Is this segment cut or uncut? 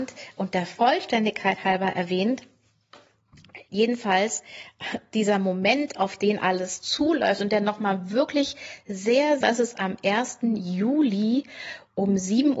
cut